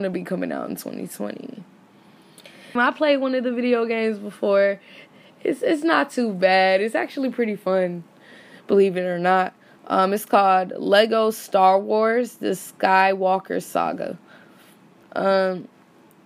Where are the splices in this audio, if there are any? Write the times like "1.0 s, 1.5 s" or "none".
2.8 s